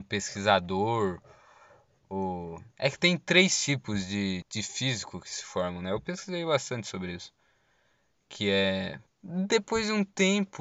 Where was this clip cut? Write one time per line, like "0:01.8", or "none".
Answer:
0:02.7
0:04.4
0:09.1